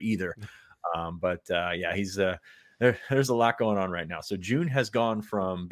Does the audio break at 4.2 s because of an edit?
no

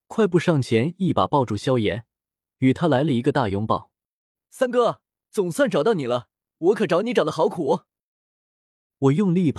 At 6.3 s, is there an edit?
no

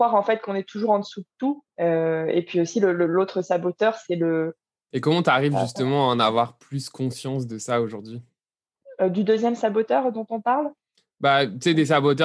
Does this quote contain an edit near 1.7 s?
yes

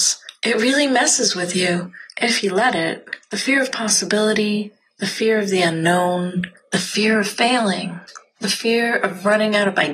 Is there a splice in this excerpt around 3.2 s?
no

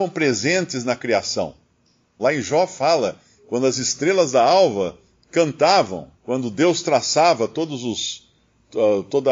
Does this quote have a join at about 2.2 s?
yes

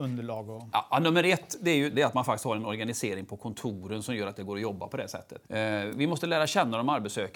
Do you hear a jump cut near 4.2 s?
no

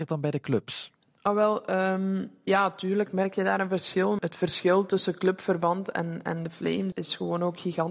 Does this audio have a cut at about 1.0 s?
no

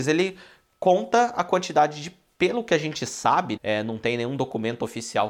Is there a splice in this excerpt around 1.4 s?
no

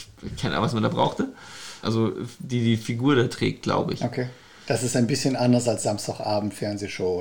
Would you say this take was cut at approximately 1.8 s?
yes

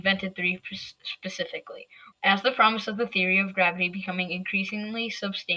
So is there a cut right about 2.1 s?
yes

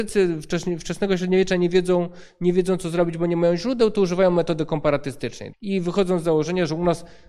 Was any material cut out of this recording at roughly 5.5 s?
yes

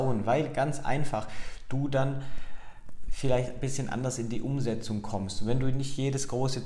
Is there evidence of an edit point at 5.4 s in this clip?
no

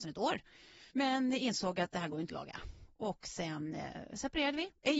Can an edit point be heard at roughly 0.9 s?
yes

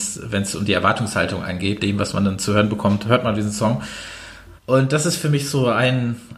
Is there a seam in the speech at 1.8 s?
yes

